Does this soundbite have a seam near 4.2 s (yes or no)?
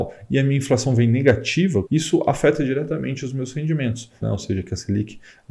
yes